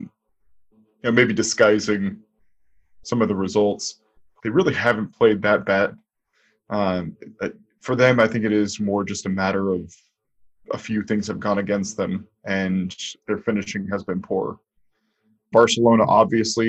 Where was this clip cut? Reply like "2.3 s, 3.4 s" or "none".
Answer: 4.4 s, 15.5 s